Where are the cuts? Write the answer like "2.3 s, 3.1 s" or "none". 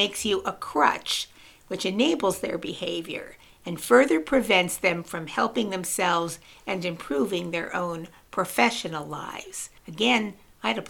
9.8 s